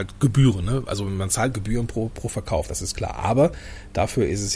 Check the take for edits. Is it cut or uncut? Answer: uncut